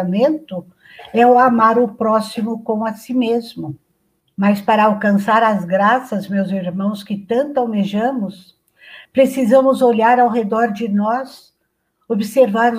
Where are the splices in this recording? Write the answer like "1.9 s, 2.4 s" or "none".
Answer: 4.2 s, 9.1 s